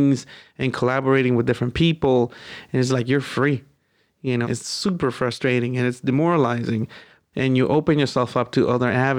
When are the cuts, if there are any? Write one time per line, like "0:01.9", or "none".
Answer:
0:04.4
0:07.3